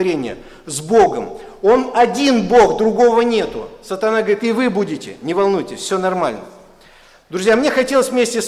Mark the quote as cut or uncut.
uncut